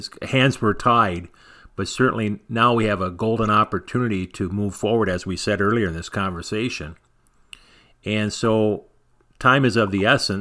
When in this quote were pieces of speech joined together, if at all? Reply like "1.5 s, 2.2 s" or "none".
none